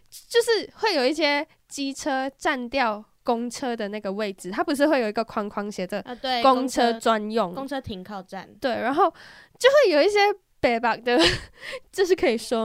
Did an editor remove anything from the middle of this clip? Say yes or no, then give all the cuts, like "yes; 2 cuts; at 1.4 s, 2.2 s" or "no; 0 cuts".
no; 0 cuts